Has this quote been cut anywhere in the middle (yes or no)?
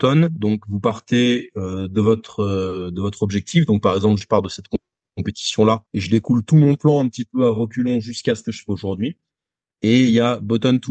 yes